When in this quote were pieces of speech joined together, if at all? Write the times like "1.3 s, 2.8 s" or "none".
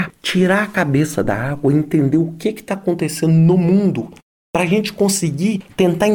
none